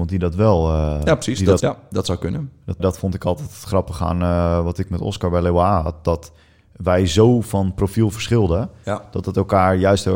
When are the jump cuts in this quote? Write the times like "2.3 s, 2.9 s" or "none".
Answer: 1.6 s, 2.8 s